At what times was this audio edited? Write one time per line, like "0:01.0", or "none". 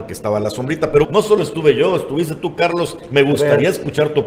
0:01.0